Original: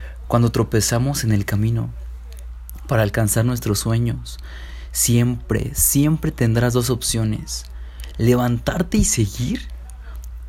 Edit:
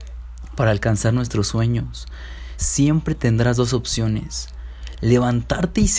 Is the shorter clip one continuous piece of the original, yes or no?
no